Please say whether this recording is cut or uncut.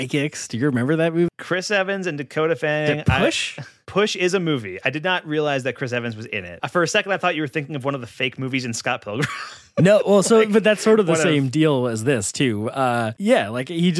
cut